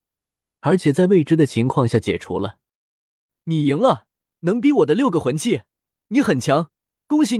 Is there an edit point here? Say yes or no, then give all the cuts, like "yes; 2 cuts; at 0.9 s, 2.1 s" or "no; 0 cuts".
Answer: no; 0 cuts